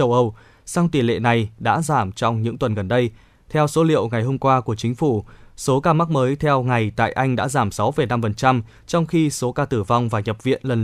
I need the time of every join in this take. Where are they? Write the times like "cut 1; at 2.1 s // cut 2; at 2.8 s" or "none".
none